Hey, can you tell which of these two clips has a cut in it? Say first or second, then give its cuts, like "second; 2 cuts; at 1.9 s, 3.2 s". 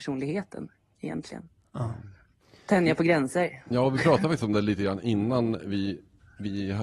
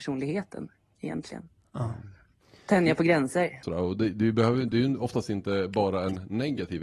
second; 1 cut; at 3.6 s